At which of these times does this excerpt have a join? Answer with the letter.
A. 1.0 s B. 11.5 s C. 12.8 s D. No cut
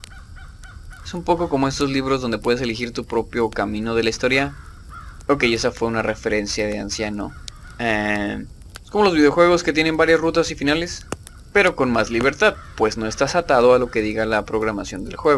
A